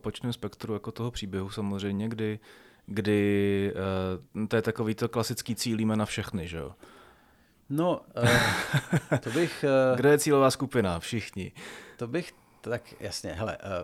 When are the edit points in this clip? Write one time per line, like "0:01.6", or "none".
none